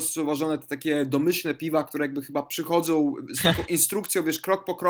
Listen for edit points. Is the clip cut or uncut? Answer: uncut